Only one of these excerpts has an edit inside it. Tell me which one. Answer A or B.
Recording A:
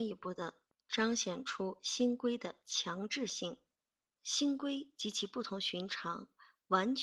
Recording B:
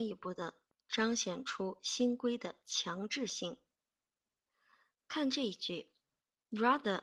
A